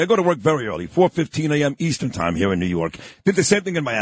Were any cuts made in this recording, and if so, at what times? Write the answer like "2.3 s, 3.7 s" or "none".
none